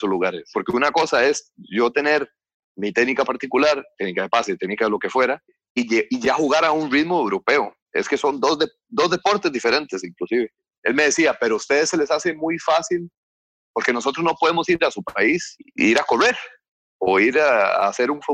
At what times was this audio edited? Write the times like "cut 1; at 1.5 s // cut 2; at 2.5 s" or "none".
none